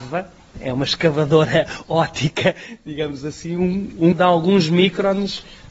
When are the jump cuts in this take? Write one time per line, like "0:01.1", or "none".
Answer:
0:04.1